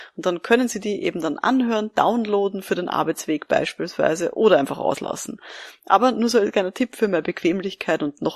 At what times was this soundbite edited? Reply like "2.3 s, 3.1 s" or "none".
none